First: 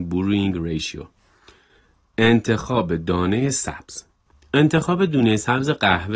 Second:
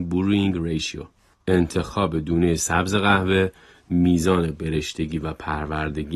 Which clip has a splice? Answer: second; 1 cut; at 1.3 s

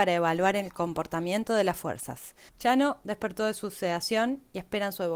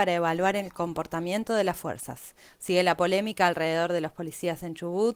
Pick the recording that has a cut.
first; 1 cut; at 2.5 s

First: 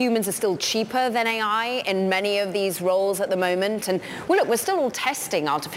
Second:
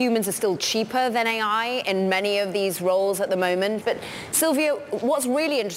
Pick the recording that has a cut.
second; 1 cut; at 3.8 s

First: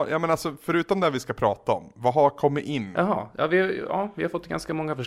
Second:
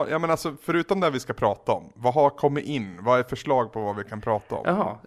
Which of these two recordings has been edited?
first; 1 cut; at 2.9 s

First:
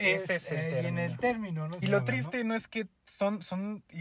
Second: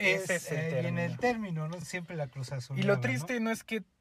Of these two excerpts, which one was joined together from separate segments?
first; 1 cut; at 1.8 s

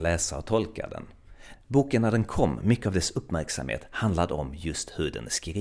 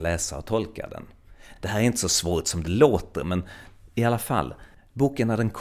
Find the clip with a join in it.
first; 1 cut; at 1.6 s

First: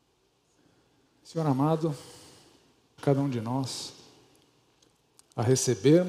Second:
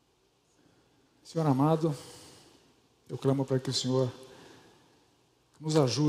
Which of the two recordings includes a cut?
first; 1 cut; at 3.0 s

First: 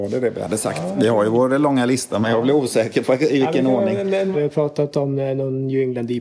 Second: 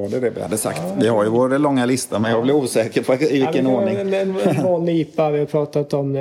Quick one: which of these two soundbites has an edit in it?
first; 1 cut; at 4.3 s

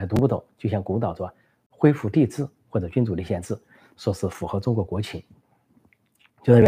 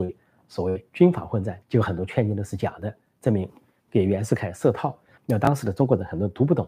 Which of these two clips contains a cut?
second; 2 cuts; at 1.6 s, 5.2 s

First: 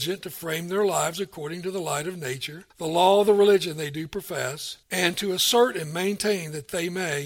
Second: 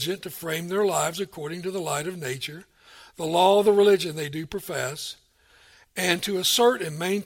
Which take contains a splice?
first; 2 cuts; at 2.7 s, 4.8 s

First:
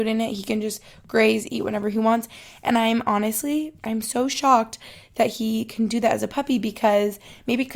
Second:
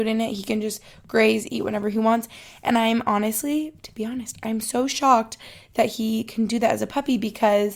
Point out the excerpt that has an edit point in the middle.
first; 1 cut; at 3.8 s

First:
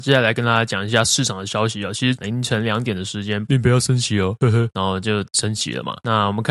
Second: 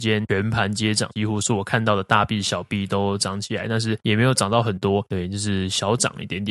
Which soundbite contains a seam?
first; 2 cuts; at 2.2 s, 3.5 s

